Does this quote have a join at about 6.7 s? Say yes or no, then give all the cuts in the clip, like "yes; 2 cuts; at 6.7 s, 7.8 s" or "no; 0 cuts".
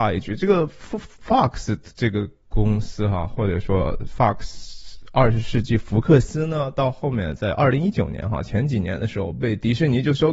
no; 0 cuts